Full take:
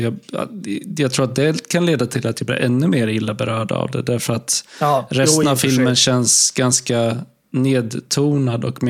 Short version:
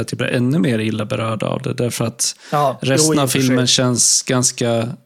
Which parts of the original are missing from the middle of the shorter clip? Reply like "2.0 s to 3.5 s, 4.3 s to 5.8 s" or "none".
none